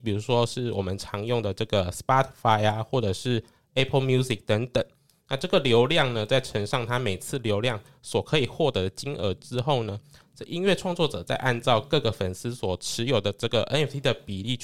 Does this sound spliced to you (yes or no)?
no